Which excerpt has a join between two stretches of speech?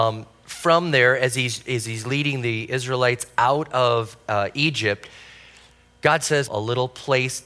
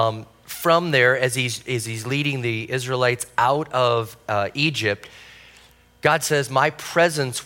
first; 1 cut; at 6.5 s

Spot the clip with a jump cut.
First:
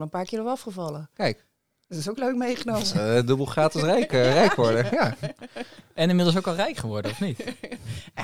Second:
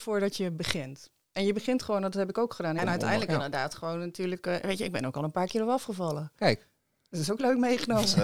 second; 1 cut; at 2.8 s

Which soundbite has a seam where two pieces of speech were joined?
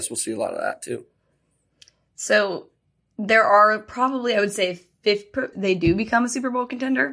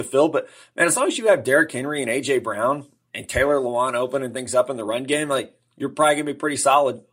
first; 1 cut; at 5.5 s

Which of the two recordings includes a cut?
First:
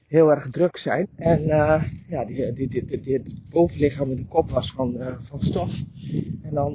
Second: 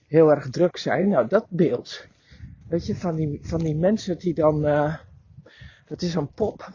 first; 1 cut; at 1.0 s

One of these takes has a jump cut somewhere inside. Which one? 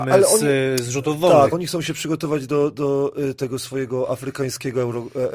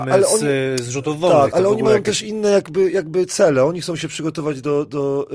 first; 1 cut; at 1.5 s

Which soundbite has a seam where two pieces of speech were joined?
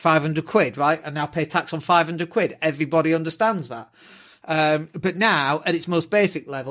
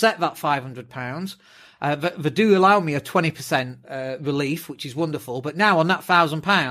second; 1 cut; at 3.8 s

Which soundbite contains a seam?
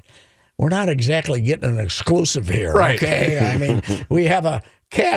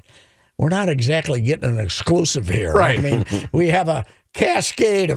second; 1 cut; at 3.0 s

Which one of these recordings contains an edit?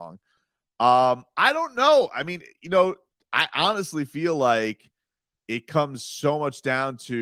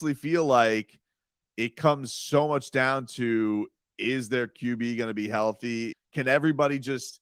second; 1 cut; at 5.9 s

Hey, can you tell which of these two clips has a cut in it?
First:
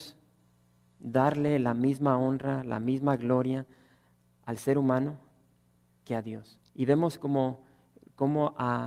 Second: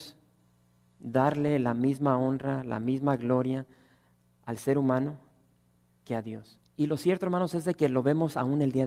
second; 1 cut; at 6.7 s

